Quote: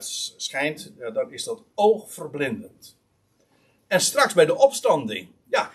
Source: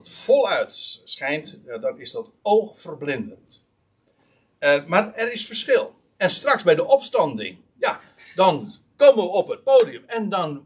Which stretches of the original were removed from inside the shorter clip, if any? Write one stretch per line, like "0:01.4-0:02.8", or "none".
0:04.5-0:06.1